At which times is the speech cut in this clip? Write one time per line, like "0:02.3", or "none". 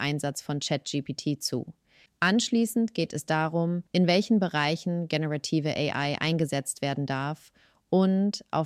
0:02.1
0:03.9